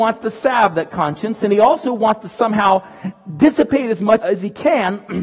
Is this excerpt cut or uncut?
cut